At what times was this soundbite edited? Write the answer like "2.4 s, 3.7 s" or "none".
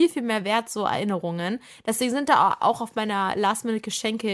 none